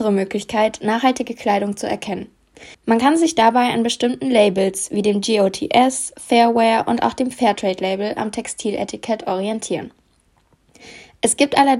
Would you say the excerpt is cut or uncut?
cut